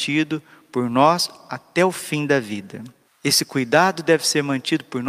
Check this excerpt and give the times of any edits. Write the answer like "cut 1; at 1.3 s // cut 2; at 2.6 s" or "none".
cut 1; at 3.0 s